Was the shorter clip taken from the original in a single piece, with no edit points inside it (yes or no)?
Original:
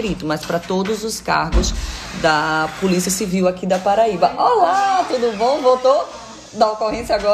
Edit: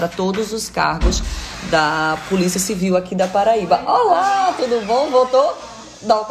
yes